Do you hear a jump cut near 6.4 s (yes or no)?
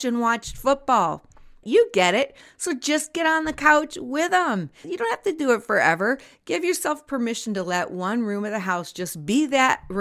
no